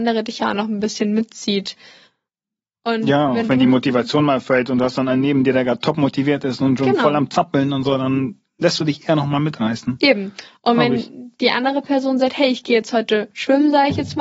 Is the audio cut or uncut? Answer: uncut